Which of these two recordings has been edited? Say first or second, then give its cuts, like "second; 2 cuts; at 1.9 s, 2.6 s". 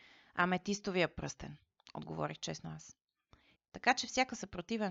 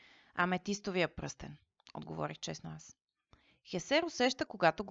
first; 1 cut; at 3.6 s